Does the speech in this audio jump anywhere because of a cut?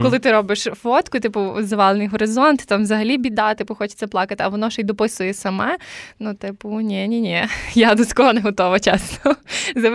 no; 0 cuts

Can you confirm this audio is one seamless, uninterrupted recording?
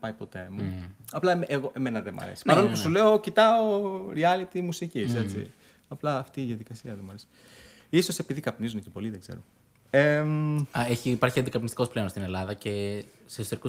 yes; 0 cuts

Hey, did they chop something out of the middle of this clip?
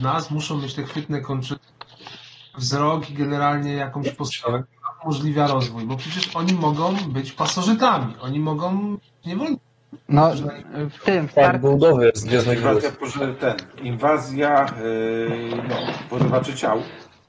no; 0 cuts

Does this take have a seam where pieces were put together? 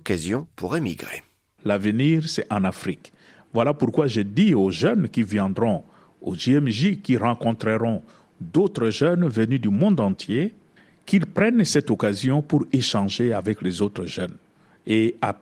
yes; 1 cut; at 1.6 s

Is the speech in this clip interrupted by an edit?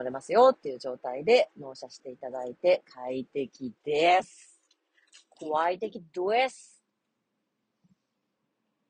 no; 0 cuts

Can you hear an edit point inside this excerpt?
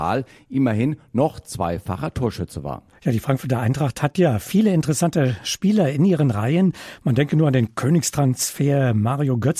no; 0 cuts

